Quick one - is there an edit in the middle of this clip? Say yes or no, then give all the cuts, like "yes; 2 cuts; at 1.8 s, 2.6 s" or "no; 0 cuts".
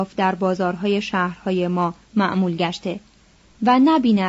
no; 0 cuts